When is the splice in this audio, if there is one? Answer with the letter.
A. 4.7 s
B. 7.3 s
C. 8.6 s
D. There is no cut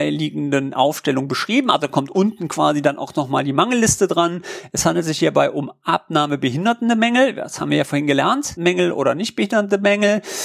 C